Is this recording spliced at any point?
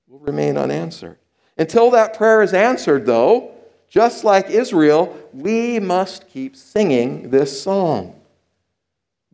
no; 0 cuts

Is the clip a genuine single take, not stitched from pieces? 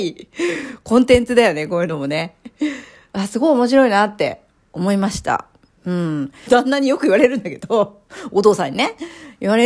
no; 1 cut; at 6.5 s

